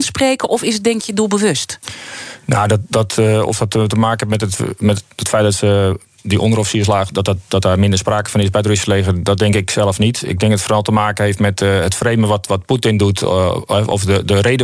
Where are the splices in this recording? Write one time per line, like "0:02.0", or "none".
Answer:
none